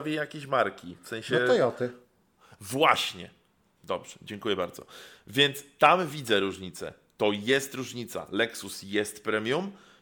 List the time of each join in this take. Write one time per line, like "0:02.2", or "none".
none